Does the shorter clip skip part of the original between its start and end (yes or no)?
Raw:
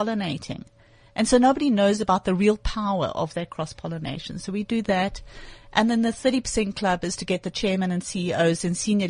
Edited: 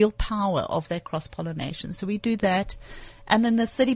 no